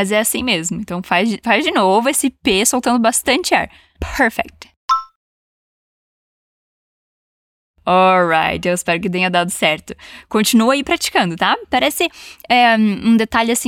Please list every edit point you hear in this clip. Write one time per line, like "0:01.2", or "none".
none